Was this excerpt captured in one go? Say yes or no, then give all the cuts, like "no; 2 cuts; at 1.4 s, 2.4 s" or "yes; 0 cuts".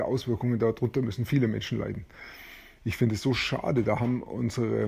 no; 1 cut; at 2.8 s